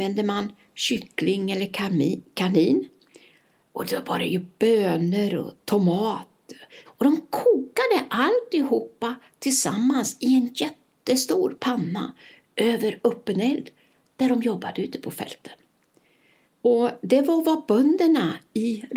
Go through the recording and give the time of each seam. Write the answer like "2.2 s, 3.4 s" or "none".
6.9 s, 16.4 s

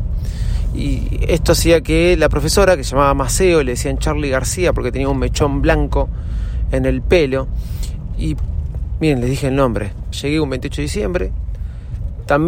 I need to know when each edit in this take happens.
10.1 s

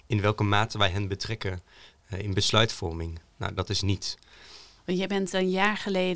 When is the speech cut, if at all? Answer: 3.6 s, 4.8 s

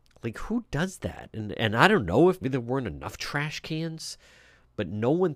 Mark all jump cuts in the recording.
2.4 s

